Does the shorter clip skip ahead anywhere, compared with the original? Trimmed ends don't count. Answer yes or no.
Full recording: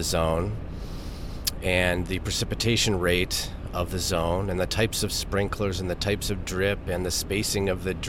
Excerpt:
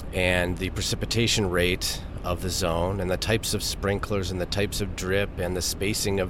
no